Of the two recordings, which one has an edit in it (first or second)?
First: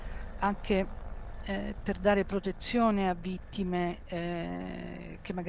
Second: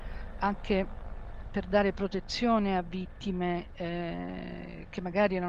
second